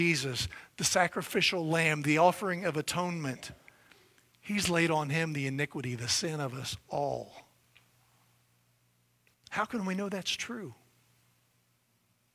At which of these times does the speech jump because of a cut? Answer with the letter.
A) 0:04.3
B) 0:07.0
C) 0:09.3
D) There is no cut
C